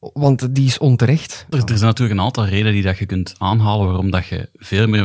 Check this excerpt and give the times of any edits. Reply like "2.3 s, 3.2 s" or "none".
1.5 s